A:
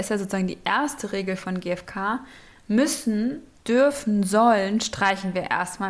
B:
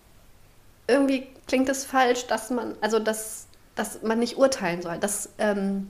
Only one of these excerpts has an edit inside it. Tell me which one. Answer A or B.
B